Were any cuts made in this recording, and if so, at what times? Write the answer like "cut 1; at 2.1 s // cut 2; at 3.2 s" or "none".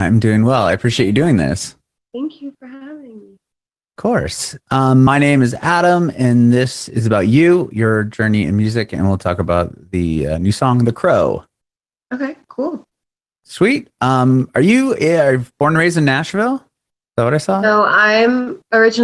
none

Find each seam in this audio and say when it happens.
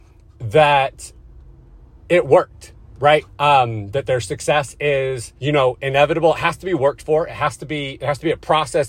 cut 1; at 3.3 s // cut 2; at 5.4 s

